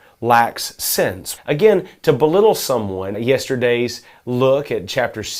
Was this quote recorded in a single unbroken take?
no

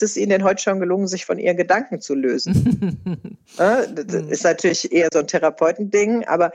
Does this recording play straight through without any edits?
yes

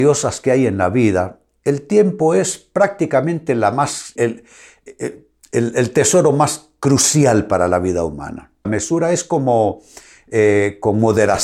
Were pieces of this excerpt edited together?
yes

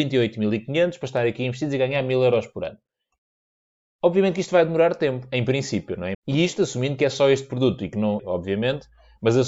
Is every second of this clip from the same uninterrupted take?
no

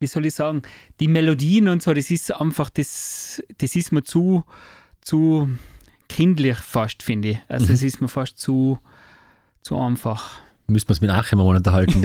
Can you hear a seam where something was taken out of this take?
no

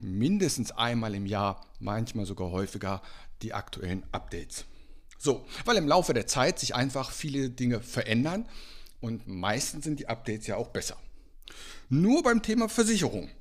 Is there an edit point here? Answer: no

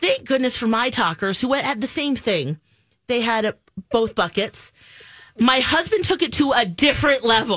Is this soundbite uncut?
yes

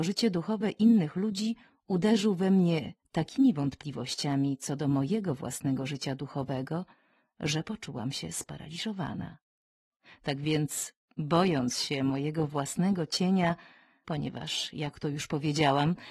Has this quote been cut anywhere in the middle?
yes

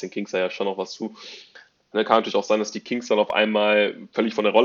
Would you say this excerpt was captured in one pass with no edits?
no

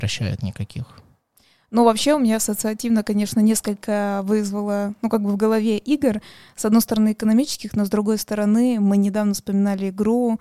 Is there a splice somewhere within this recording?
no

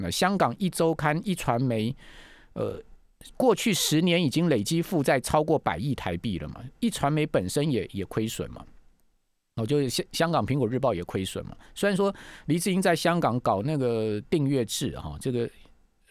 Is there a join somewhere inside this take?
no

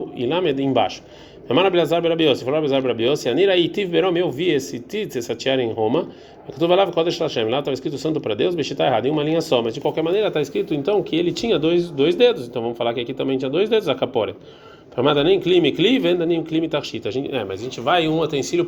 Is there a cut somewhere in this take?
no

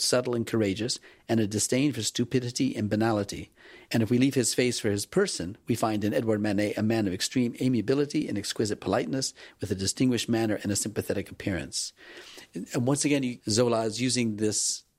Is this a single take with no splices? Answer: no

